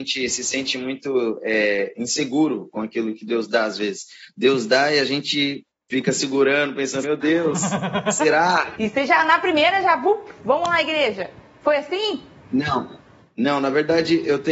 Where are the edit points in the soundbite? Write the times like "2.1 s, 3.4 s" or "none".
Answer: 7.0 s, 8.8 s